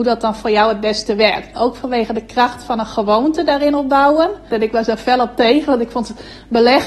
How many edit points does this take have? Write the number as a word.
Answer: two